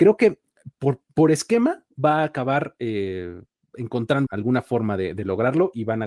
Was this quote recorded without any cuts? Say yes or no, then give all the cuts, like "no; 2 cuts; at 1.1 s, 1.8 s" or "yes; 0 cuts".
no; 2 cuts; at 1.1 s, 4.3 s